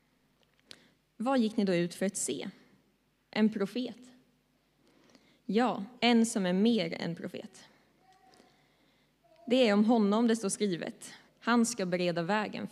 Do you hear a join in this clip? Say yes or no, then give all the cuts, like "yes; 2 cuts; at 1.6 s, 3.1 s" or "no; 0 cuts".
yes; 2 cuts; at 6.0 s, 11.3 s